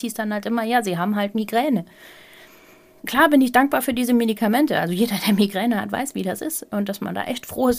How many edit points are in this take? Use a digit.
1